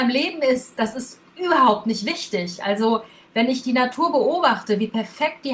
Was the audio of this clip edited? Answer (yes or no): no